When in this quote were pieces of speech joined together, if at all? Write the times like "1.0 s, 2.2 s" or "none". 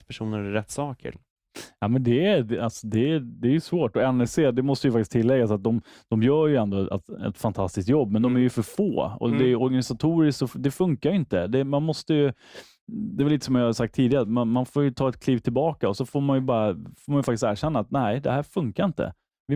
1.1 s